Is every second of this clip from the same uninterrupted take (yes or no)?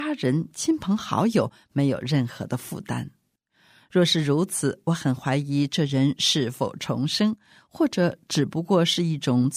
yes